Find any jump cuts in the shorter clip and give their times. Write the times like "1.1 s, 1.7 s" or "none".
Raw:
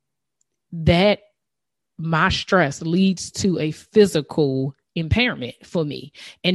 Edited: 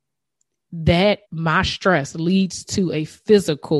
1.2 s